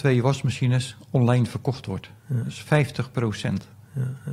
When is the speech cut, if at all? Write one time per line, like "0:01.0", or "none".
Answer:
none